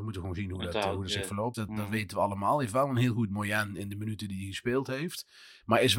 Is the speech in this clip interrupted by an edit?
yes; 1 cut; at 1.5 s

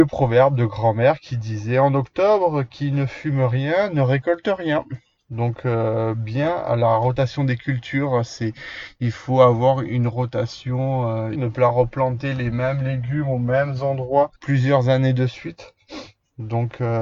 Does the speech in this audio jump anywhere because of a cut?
yes; 3 cuts; at 5.2 s, 11.4 s, 14.4 s

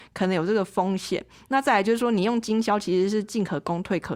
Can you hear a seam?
no; 0 cuts

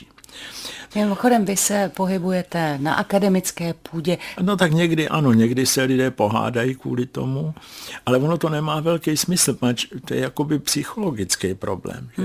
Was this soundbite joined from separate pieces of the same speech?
yes; 2 cuts; at 0.9 s, 4.4 s

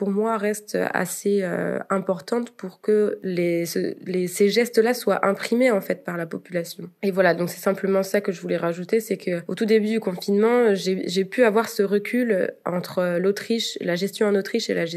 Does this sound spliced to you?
no; 0 cuts

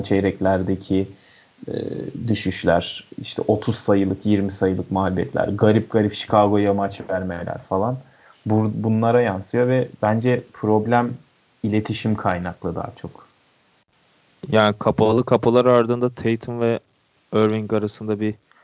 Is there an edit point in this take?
no; 0 cuts

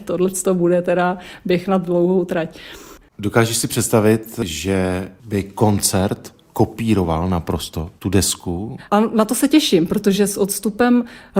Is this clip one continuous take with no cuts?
no; 2 cuts; at 3.0 s, 8.8 s

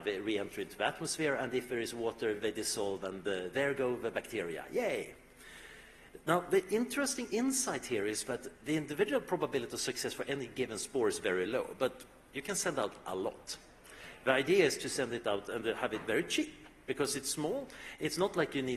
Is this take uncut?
yes; 0 cuts

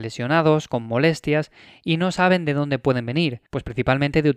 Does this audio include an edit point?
yes; 1 cut; at 3.5 s

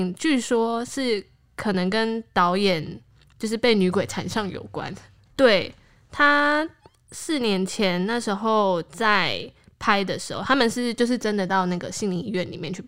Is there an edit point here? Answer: yes; 1 cut; at 5.3 s

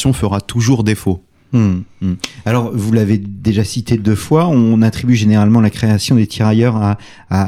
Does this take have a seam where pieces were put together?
no; 0 cuts

